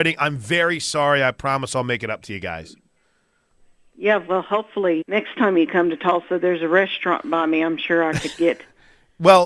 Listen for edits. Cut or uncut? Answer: cut